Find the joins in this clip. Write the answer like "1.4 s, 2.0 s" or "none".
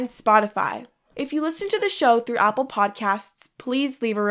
none